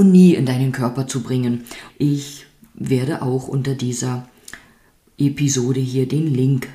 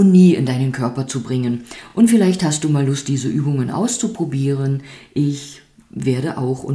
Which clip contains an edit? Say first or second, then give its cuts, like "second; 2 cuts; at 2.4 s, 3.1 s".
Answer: first; 1 cut; at 1.9 s